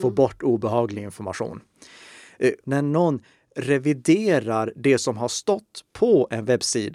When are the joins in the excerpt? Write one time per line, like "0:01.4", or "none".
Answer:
0:02.6